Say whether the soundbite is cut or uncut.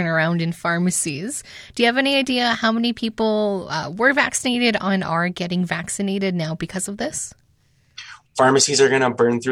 cut